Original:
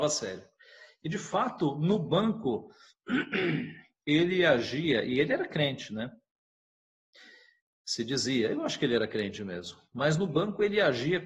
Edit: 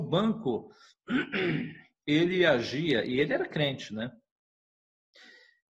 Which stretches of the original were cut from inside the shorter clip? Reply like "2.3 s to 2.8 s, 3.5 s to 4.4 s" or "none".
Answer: none